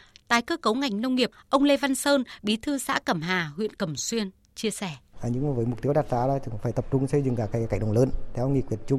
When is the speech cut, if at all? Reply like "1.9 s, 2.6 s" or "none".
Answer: 5.1 s